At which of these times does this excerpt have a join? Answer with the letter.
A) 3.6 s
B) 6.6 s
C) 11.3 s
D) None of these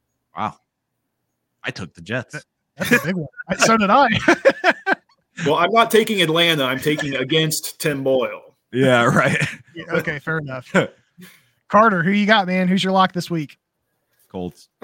D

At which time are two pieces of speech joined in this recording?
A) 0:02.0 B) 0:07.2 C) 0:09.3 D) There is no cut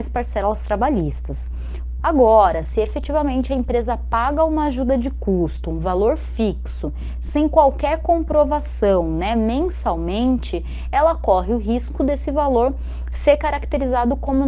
A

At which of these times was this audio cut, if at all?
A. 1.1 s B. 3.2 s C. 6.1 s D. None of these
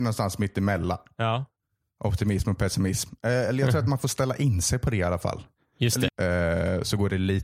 C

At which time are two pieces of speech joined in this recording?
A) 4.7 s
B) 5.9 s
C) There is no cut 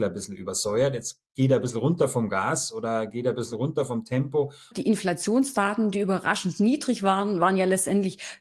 A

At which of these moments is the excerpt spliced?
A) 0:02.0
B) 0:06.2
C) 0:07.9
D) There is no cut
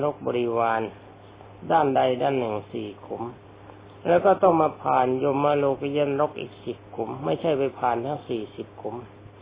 D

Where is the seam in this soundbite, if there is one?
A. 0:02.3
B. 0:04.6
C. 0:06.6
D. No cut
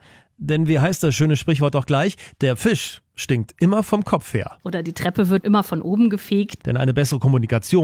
C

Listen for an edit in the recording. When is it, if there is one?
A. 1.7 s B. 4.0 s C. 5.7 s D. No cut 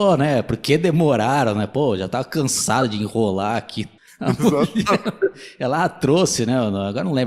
B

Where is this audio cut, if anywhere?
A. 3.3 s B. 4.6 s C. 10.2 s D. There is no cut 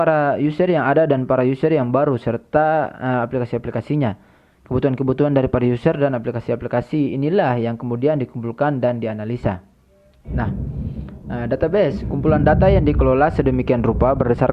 C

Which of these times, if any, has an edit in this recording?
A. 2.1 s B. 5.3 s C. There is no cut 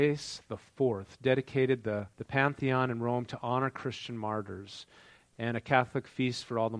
A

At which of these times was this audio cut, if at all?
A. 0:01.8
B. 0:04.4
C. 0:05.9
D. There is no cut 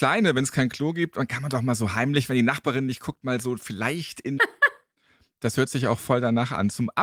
B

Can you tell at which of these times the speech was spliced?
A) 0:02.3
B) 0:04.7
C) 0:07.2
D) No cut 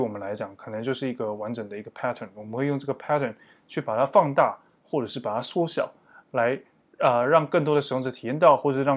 D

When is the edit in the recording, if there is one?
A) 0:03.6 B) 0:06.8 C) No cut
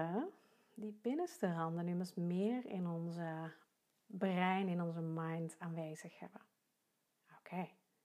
C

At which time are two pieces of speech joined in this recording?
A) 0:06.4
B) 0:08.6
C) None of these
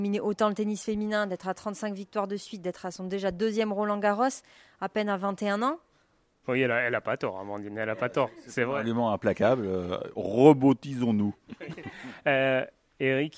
A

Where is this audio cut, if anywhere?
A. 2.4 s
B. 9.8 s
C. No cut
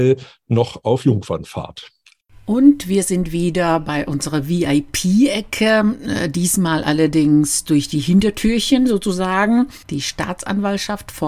B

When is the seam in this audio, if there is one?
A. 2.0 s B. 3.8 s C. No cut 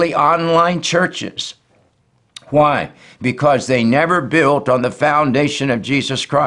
C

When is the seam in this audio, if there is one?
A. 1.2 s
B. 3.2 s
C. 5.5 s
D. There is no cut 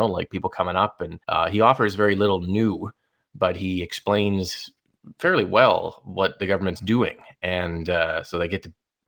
A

